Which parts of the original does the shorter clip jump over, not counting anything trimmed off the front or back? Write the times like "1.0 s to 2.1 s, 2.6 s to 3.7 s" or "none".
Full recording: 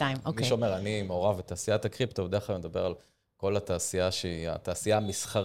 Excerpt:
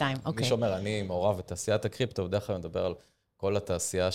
none

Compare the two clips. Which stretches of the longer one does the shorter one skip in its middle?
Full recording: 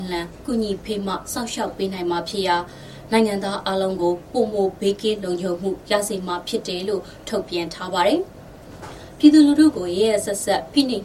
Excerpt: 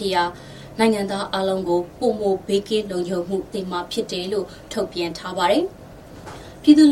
5.9 s to 6.1 s

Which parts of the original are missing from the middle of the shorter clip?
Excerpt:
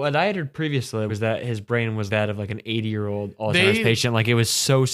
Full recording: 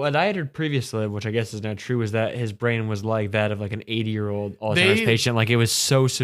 1.1 s to 2.0 s, 3.0 s to 3.3 s

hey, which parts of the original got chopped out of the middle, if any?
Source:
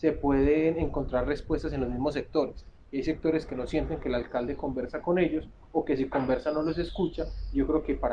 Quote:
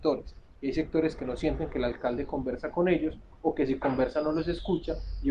none

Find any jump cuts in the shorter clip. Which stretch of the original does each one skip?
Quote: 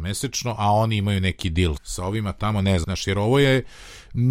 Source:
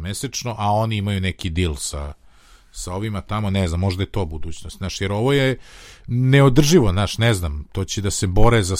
1.8 s to 2.7 s, 3.7 s to 4.8 s

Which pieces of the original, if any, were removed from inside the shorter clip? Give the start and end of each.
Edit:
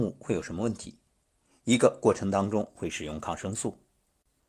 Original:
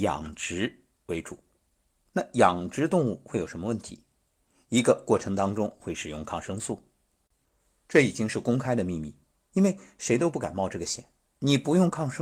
none

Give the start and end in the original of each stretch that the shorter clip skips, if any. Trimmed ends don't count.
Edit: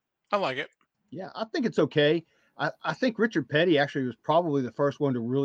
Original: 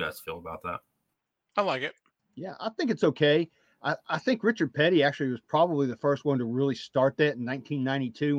none

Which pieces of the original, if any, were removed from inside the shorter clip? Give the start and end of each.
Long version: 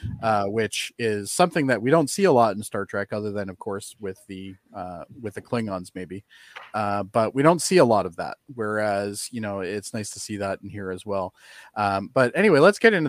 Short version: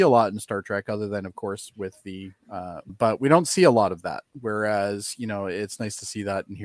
5.1 s to 7.0 s

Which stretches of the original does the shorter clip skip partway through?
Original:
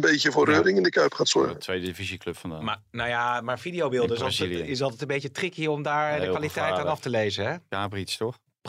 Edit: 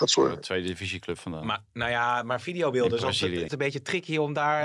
4.7 s to 5.0 s

